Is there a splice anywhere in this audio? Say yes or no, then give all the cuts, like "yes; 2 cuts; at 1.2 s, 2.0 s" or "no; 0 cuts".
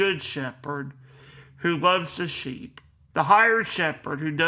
yes; 1 cut; at 3.1 s